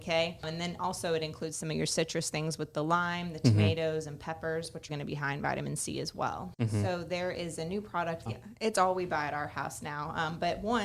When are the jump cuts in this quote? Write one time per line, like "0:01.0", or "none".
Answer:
0:04.9
0:06.5
0:08.3

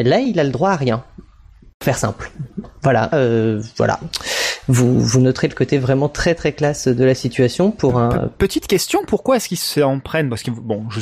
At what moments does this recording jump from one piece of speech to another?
0:03.1

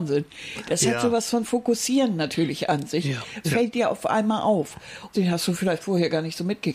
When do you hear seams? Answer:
0:03.4
0:05.1

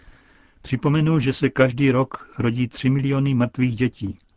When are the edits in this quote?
none

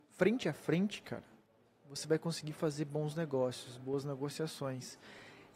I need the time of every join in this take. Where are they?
none

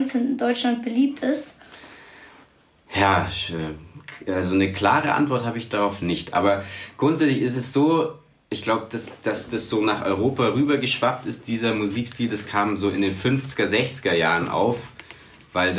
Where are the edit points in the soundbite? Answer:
none

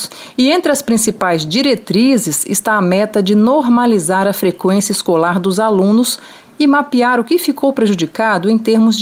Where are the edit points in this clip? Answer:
none

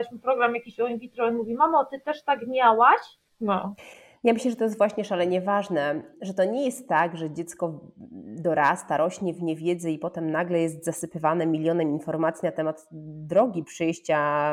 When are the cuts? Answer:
0:03.3
0:06.1

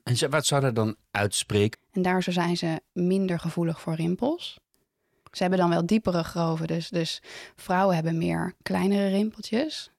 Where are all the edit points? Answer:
0:01.7

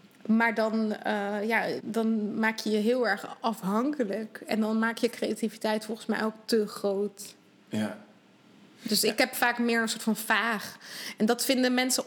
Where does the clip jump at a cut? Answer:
0:01.8

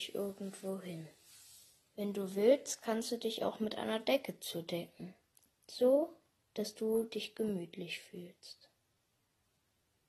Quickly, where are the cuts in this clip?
none

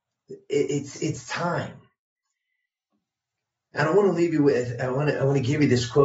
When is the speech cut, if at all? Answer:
none

